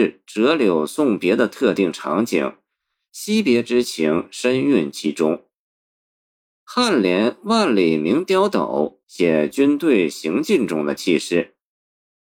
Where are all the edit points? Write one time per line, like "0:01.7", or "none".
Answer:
0:09.0